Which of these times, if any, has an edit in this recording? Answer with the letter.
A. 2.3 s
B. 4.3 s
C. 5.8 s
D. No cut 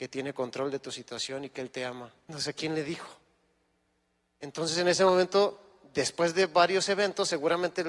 A